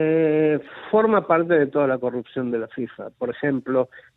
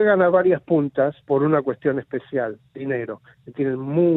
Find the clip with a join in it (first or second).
second